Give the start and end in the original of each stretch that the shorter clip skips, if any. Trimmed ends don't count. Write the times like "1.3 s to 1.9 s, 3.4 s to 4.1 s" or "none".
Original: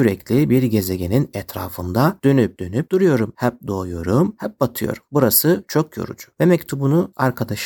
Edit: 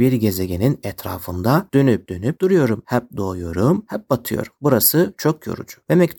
none